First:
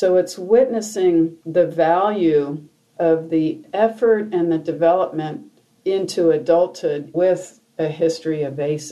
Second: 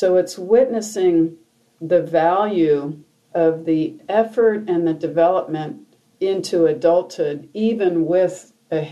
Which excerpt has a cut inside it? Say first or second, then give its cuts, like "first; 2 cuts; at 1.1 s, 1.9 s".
first; 2 cuts; at 1.4 s, 7.1 s